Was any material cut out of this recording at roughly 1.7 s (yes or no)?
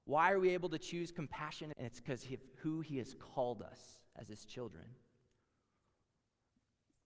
yes